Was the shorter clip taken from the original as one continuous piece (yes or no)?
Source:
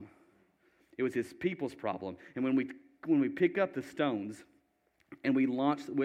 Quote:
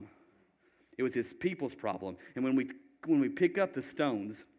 yes